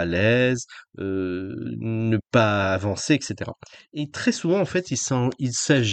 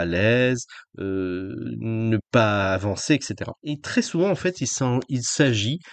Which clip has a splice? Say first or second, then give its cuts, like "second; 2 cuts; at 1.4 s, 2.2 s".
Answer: second; 1 cut; at 3.6 s